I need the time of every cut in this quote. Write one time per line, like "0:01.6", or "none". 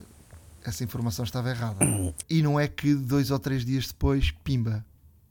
0:02.2

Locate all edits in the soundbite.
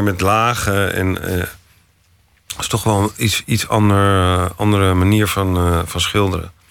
none

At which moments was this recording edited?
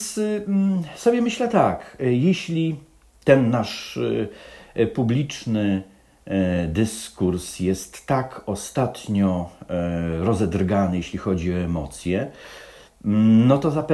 none

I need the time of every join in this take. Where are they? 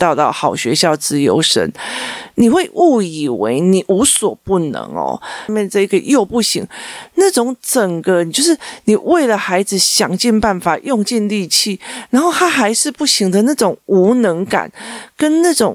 0:05.5

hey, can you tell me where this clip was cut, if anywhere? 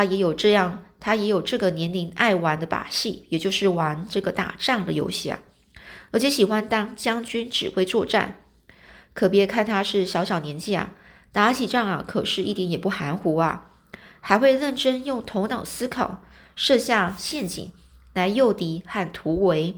none

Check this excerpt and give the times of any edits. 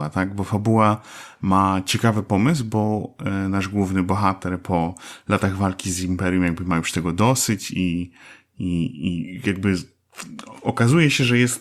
none

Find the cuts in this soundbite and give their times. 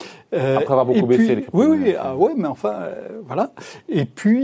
none

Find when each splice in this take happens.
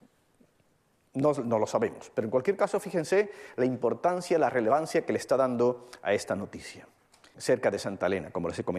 0:07.3

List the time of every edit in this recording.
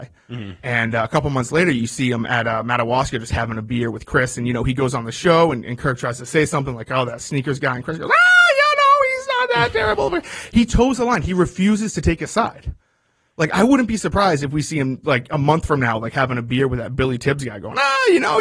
none

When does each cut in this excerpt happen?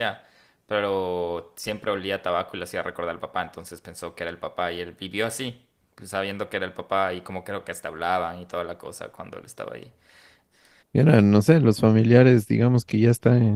0:10.8

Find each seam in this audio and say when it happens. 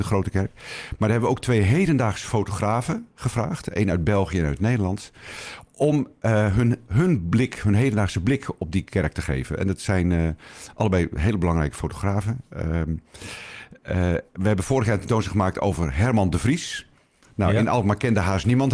none

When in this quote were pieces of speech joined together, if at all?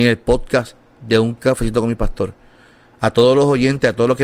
none

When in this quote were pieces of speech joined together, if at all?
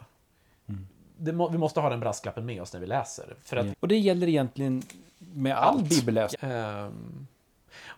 0:03.7
0:06.3

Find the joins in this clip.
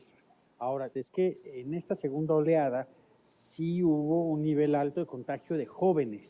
0:00.9

